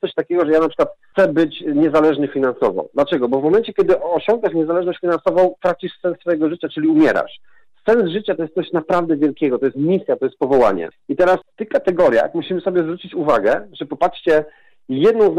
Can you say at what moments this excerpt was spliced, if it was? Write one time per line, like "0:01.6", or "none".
none